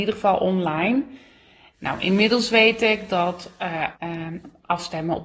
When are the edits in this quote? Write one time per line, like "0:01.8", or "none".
0:01.7
0:03.9